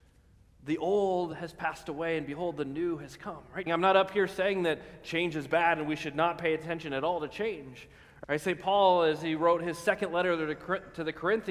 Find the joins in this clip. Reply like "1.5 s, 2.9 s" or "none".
3.7 s, 8.2 s